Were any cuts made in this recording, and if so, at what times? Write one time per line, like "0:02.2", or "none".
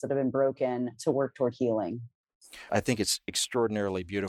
0:02.7